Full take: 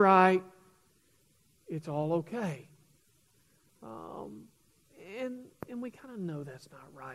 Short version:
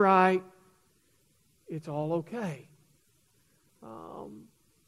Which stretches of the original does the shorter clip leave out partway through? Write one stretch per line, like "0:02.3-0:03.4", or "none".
none